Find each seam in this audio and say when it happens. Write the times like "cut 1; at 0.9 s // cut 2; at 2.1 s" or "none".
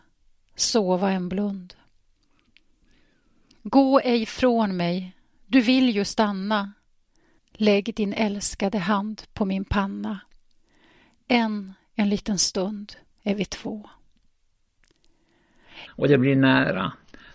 cut 1; at 7.4 s // cut 2; at 15.9 s